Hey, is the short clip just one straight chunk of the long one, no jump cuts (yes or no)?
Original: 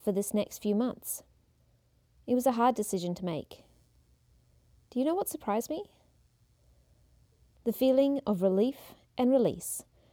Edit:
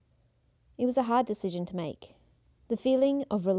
no